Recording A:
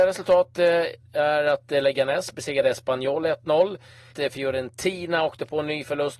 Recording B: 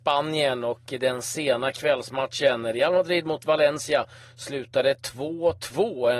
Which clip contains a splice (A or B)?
A